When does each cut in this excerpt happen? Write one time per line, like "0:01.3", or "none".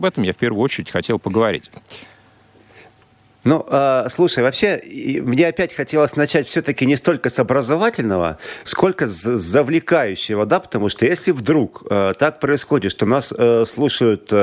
none